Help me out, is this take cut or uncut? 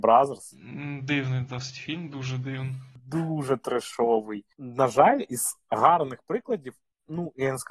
uncut